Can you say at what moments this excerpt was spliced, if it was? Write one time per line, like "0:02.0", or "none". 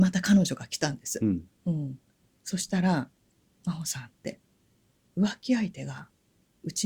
none